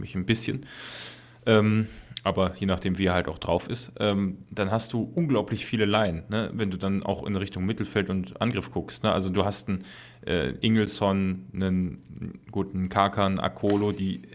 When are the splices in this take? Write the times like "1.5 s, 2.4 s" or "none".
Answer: 4.4 s